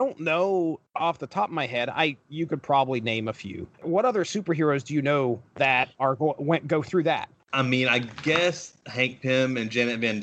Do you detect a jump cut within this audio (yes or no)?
no